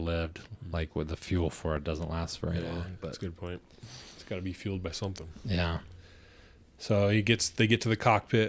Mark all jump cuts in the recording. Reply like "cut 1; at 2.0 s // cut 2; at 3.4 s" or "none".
none